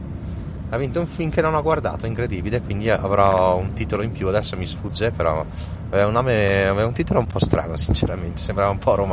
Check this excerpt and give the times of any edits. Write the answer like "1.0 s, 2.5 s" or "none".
none